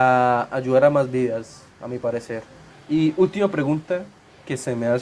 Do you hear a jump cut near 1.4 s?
no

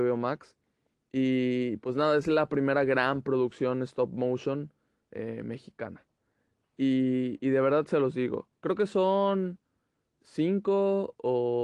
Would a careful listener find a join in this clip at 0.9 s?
yes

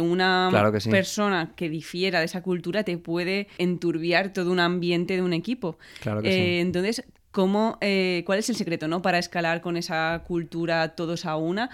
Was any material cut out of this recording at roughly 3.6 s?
yes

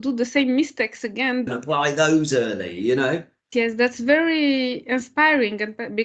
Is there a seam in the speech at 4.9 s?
no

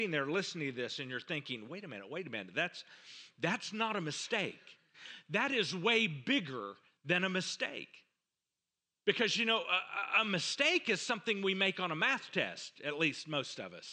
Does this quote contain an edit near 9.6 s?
no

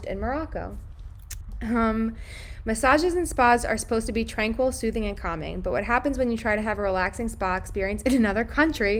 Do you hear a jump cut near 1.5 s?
no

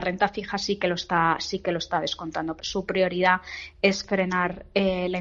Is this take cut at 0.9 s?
no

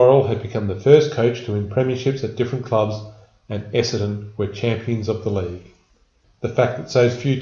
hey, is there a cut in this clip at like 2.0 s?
no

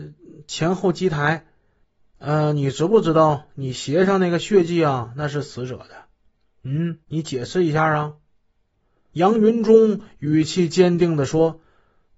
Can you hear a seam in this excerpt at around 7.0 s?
yes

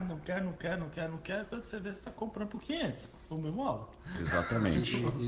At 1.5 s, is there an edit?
no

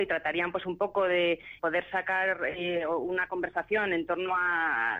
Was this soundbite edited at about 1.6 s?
yes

